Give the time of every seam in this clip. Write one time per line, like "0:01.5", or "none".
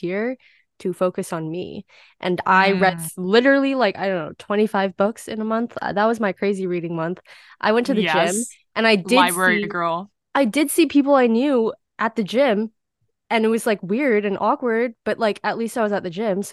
none